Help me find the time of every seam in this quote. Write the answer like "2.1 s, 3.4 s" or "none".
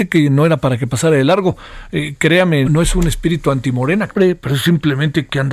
2.6 s, 4.1 s